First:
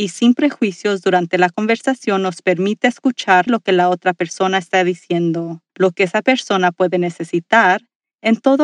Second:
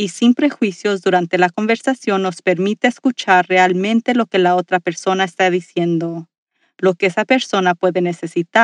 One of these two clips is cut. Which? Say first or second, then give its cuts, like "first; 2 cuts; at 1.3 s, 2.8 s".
first; 2 cuts; at 3.5 s, 5.7 s